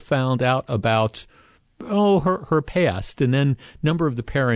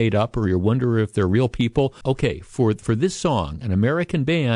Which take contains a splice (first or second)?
second